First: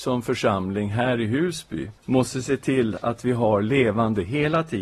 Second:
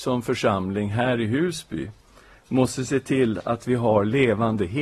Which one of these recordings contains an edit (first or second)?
first